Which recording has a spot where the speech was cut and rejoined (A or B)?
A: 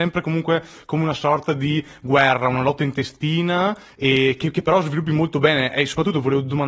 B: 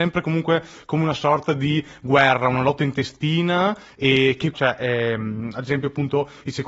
B